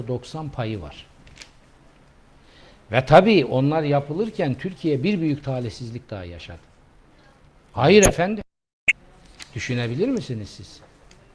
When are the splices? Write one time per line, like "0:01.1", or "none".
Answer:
0:07.7
0:09.4